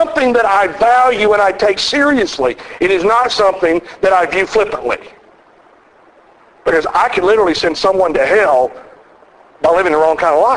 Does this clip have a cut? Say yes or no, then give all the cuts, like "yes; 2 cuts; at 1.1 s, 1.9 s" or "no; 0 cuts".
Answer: yes; 1 cut; at 1.8 s